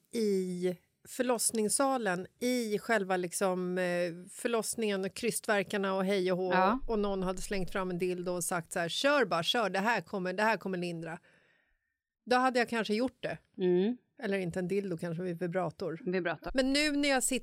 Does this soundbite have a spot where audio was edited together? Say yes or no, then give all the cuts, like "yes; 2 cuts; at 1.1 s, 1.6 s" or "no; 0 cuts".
yes; 1 cut; at 16.5 s